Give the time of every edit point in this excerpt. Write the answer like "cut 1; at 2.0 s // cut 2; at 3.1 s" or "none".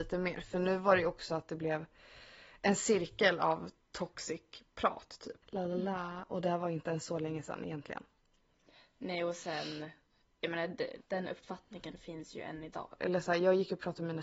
cut 1; at 5.4 s // cut 2; at 11.0 s // cut 3; at 13.0 s

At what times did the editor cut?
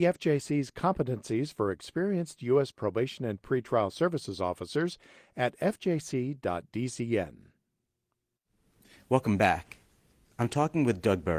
none

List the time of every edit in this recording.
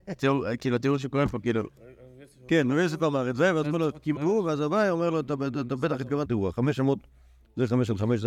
cut 1; at 4.2 s // cut 2; at 6.3 s

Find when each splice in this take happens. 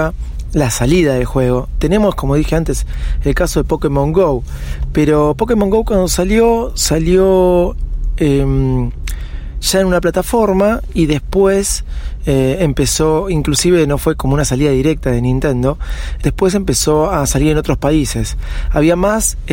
cut 1; at 16.2 s

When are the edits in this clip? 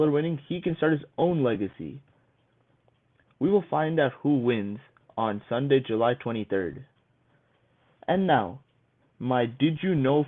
none

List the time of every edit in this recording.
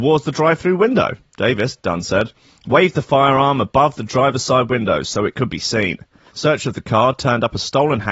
cut 1; at 6.3 s

